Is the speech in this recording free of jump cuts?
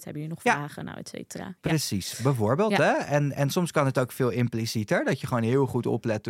yes; 0 cuts

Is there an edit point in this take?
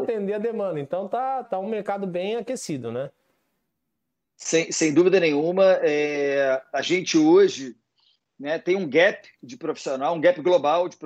yes; 1 cut; at 1.4 s

